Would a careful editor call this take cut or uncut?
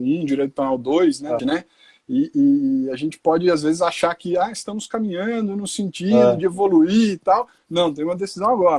cut